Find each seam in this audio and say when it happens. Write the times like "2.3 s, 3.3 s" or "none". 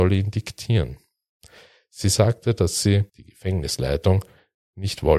none